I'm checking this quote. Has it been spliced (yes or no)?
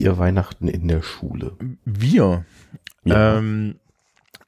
no